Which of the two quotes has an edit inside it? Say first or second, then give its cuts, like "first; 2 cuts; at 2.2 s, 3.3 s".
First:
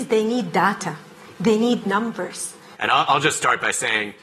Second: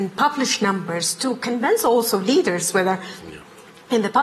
first; 1 cut; at 2.7 s